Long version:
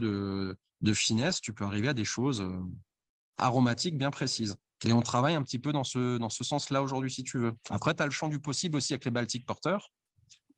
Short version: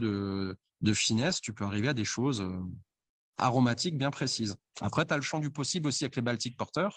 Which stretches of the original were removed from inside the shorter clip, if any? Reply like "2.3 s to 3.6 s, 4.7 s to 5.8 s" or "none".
4.7 s to 7.6 s